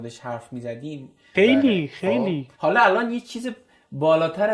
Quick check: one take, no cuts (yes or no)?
no